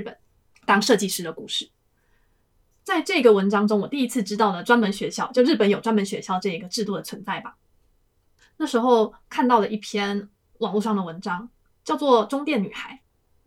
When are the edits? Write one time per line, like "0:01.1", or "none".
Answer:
0:08.4